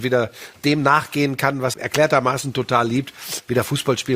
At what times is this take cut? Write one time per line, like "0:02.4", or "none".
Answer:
0:01.7